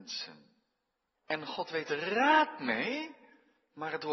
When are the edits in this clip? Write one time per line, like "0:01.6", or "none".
0:01.2